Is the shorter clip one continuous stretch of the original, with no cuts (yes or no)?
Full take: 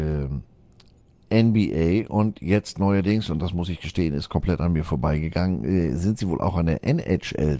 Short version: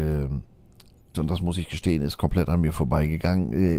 no